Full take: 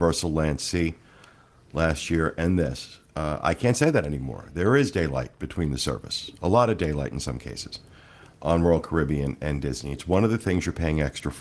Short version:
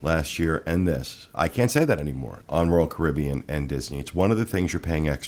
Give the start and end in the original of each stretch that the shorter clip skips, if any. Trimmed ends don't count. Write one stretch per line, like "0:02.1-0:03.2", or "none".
0:03.1-0:03.4
0:04.5-0:08.3